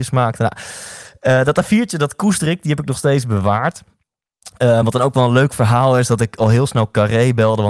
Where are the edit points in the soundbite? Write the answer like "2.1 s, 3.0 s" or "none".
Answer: none